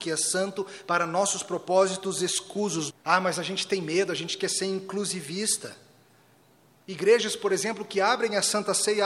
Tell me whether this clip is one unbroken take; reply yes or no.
no